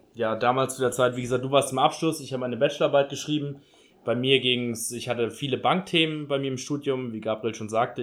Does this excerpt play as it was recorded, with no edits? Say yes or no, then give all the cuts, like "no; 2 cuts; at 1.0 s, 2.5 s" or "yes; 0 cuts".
yes; 0 cuts